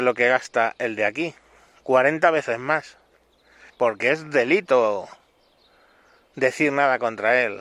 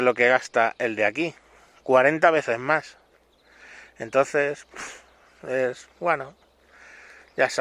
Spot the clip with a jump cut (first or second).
first